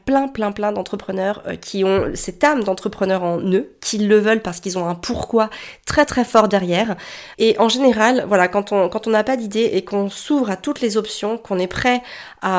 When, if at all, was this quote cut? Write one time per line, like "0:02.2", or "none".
0:07.3